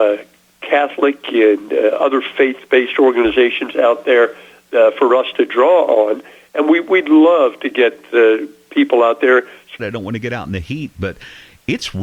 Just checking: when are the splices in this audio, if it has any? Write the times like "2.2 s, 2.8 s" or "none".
9.8 s